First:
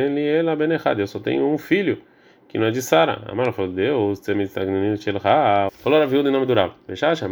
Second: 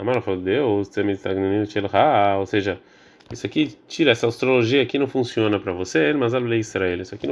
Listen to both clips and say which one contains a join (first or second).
first